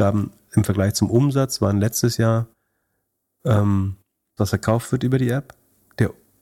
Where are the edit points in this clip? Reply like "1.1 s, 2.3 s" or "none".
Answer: 4.4 s